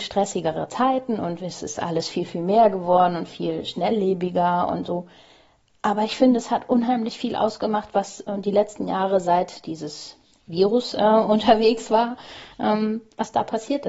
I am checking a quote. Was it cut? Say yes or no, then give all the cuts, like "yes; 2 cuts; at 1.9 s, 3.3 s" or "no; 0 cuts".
no; 0 cuts